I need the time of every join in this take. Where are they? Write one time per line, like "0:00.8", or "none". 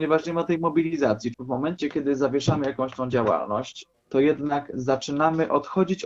0:01.3